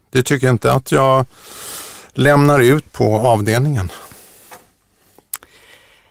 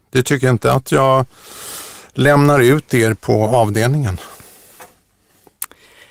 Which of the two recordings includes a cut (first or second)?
first